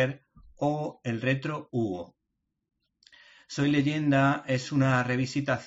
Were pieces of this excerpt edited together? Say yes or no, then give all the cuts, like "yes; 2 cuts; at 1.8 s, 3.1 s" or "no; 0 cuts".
no; 0 cuts